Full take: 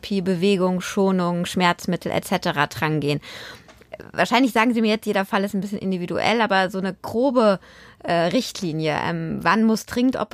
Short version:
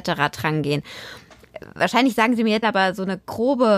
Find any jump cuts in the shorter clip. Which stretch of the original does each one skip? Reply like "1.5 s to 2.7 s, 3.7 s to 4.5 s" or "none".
5.0 s to 6.4 s